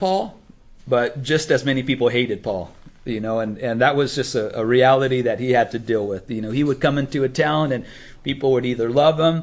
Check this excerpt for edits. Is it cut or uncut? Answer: uncut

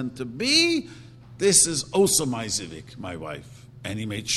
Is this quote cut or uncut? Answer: uncut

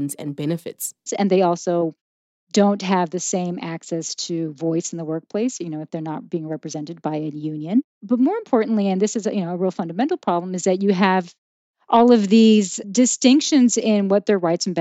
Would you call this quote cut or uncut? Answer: cut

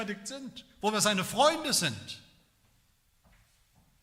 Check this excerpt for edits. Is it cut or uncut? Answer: uncut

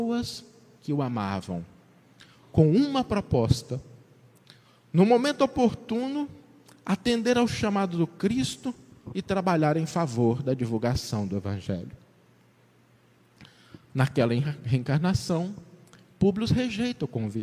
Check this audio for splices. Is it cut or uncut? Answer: uncut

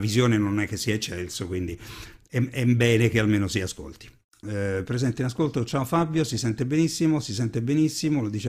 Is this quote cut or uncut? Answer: cut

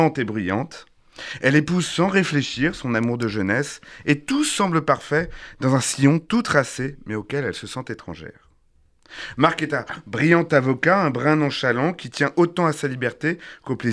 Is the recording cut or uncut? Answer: uncut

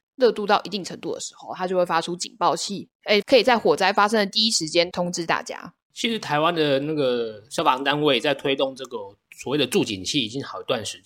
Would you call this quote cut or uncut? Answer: cut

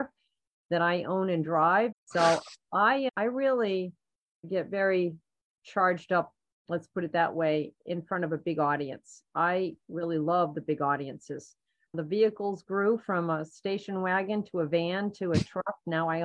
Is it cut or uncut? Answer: cut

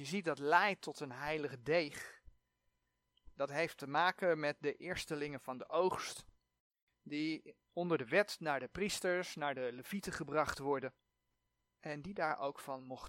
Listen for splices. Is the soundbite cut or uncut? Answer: uncut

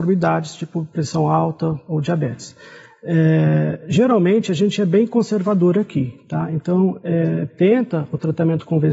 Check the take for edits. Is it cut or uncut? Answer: cut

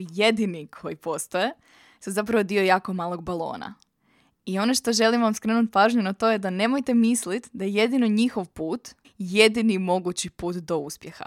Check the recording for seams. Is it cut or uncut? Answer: cut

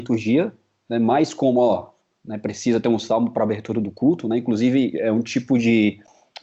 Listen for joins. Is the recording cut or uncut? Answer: uncut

